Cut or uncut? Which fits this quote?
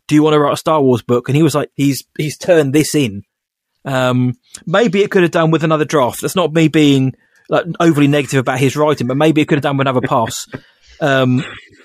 cut